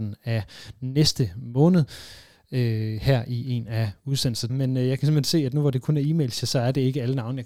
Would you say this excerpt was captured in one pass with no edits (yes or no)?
no